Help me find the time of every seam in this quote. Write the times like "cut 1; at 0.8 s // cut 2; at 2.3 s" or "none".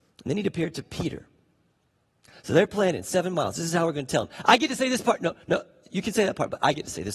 none